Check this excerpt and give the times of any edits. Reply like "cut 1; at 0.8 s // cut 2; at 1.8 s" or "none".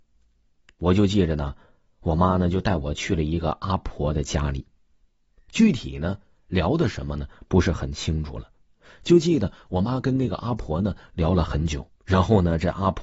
cut 1; at 12.0 s